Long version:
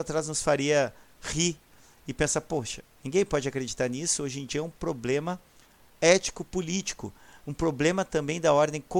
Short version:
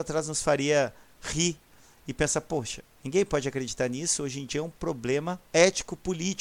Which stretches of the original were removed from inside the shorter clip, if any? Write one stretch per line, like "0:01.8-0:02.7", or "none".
0:05.5-0:05.9